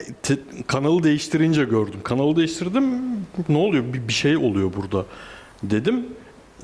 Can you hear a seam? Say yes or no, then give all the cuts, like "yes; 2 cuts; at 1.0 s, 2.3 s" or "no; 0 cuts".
no; 0 cuts